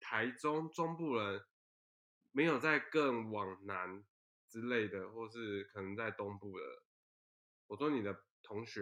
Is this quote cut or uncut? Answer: uncut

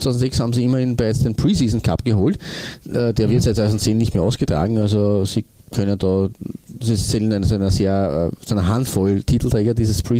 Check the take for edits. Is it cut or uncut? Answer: uncut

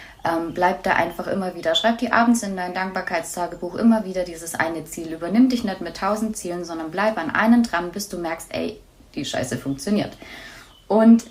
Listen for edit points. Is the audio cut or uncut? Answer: uncut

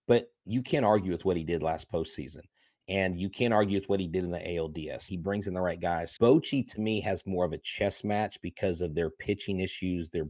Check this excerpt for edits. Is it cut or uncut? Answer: cut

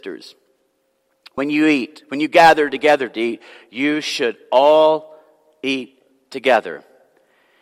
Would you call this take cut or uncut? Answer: uncut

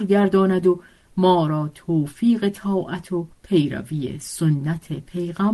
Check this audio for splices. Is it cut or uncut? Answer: cut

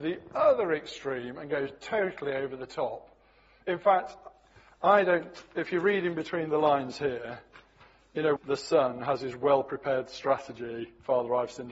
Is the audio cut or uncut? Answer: cut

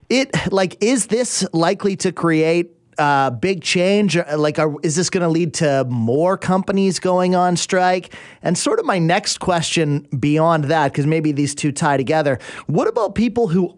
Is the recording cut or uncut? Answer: uncut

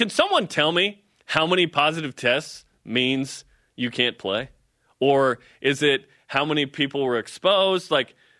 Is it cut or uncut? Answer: uncut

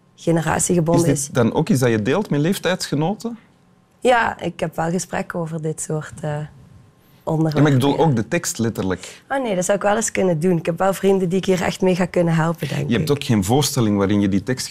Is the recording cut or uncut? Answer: uncut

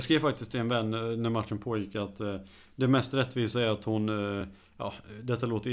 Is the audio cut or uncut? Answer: uncut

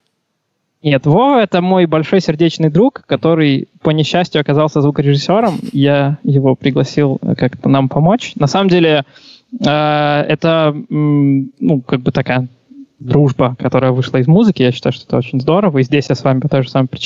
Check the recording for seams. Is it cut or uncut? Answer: uncut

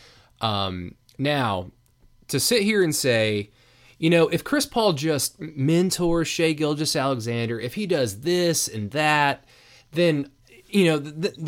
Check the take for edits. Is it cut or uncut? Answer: uncut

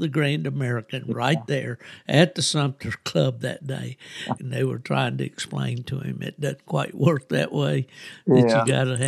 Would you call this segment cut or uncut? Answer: cut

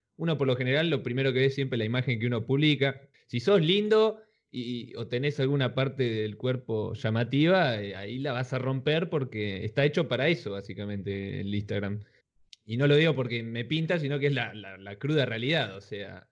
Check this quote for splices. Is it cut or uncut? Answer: uncut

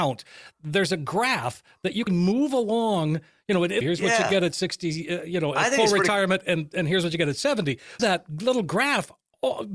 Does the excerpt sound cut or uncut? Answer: cut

